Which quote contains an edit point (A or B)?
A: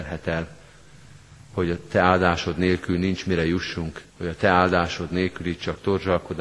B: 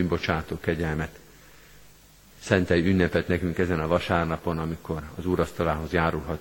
A